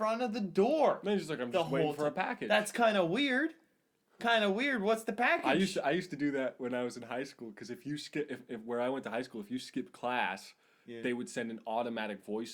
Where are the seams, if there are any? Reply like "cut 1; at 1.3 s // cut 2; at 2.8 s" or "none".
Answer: none